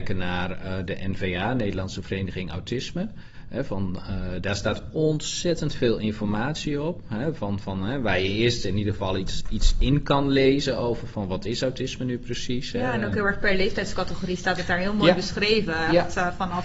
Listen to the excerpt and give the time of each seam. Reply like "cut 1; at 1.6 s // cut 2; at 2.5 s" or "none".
none